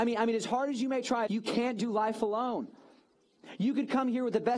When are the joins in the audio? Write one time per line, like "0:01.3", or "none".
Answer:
0:01.3